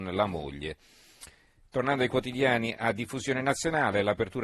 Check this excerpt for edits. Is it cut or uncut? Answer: uncut